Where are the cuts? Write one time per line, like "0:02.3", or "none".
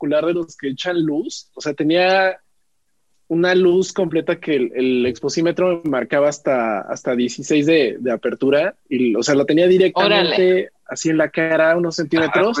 none